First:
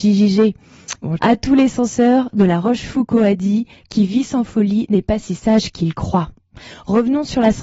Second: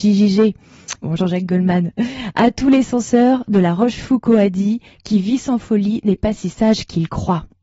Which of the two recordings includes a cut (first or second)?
first